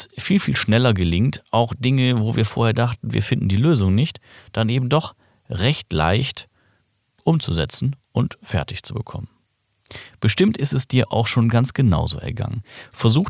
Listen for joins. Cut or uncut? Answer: uncut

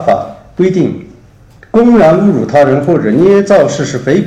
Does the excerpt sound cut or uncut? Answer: uncut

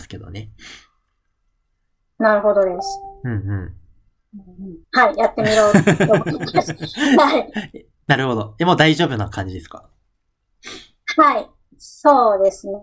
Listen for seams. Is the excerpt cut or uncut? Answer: cut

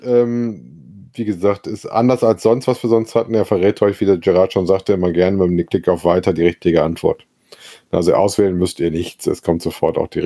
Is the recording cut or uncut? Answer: uncut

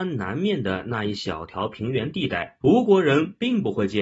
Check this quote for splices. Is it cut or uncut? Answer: cut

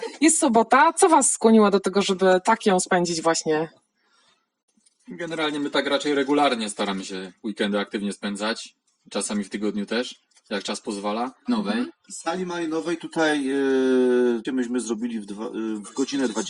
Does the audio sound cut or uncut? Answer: cut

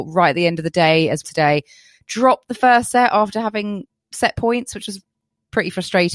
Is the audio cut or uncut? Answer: cut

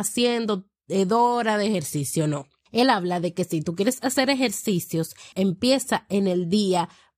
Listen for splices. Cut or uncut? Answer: cut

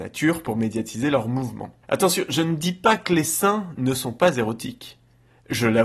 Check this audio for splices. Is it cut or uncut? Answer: cut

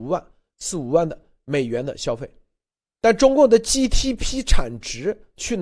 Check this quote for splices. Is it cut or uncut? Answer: uncut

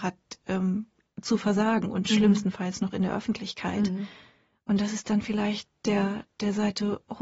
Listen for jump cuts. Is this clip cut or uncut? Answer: uncut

